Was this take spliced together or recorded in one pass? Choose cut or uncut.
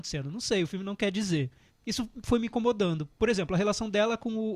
cut